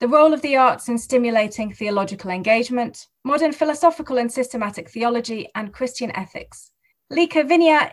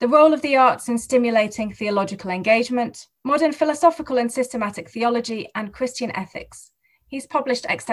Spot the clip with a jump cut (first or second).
first